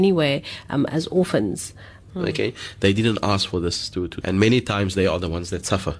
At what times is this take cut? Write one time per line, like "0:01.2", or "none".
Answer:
0:02.1
0:04.2